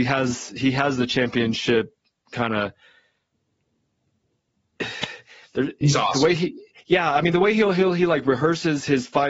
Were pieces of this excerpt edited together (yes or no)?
no